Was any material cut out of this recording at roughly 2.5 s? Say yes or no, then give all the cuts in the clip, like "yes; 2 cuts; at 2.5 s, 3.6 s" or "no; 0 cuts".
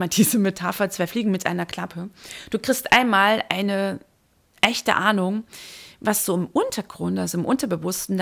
no; 0 cuts